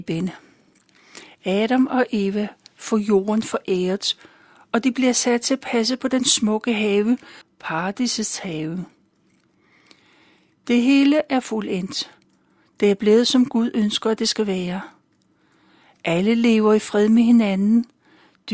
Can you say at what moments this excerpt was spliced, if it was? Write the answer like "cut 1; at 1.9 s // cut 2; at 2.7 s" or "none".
cut 1; at 7.4 s